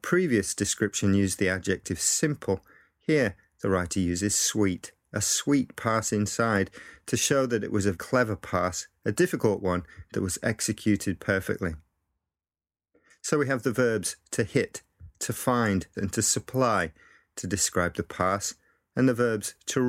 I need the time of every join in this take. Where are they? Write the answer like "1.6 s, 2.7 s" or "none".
7.9 s, 15.9 s